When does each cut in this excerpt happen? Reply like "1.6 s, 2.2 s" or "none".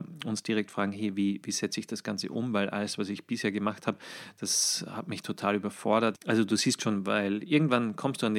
6.2 s